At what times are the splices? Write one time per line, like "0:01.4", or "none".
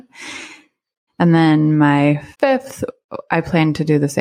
0:01.1
0:02.3